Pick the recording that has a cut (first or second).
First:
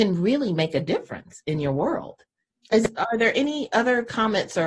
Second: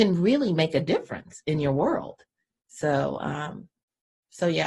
first